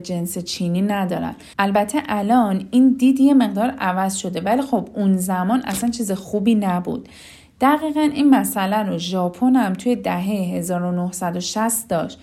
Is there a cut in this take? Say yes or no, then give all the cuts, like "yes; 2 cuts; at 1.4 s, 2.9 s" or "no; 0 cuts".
yes; 1 cut; at 1.5 s